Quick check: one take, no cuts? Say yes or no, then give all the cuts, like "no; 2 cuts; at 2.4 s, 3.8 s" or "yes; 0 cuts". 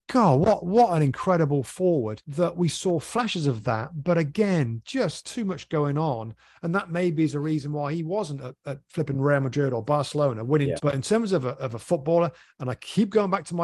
no; 1 cut; at 10.8 s